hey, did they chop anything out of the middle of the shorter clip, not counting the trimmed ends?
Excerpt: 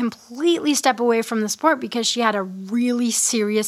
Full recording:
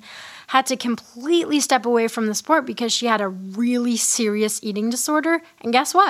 no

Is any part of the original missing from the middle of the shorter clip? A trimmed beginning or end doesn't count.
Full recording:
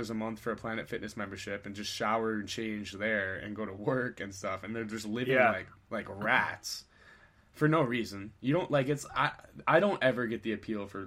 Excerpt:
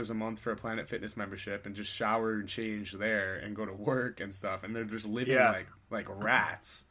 no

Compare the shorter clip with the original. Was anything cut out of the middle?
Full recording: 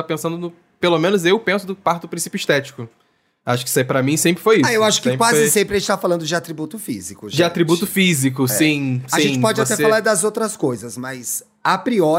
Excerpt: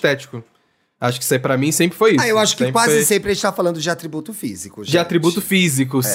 no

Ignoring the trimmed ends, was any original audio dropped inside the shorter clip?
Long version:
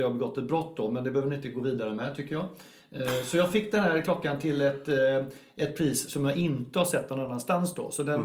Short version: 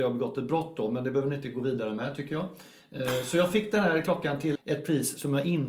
yes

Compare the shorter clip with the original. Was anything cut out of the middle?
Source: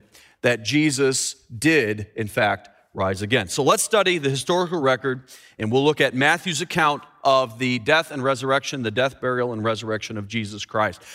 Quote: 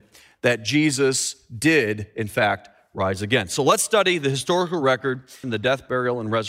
yes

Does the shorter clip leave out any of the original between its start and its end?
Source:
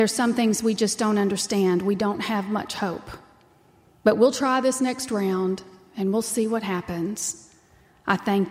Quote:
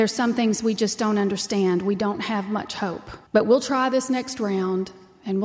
yes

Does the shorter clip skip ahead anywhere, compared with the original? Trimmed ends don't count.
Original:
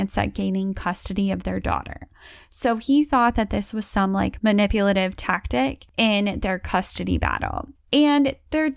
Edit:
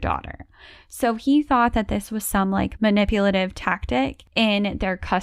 no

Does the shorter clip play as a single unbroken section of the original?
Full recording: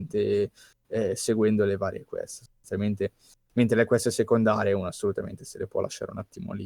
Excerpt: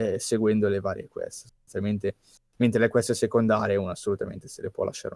yes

